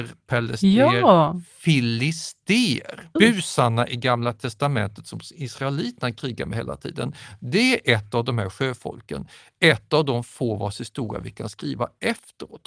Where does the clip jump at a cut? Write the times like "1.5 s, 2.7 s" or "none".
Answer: 3.2 s